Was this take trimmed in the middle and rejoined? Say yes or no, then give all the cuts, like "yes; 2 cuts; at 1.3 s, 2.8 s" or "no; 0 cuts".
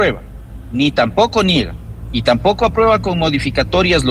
no; 0 cuts